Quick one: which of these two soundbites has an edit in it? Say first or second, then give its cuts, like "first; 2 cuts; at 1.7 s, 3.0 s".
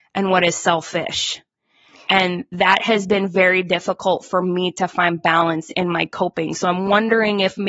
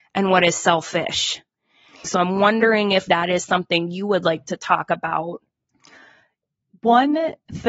second; 2 cuts; at 2.0 s, 3.1 s